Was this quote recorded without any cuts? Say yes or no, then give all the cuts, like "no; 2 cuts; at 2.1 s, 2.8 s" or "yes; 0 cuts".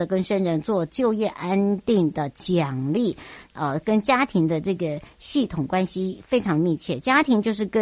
no; 1 cut; at 3.5 s